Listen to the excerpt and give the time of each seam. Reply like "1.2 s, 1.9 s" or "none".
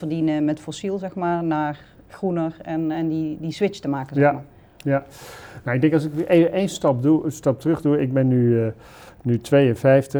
none